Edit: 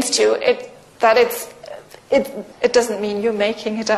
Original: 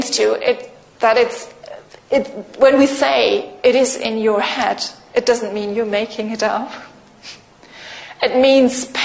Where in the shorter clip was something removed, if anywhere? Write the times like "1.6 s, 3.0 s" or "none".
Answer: 2.5 s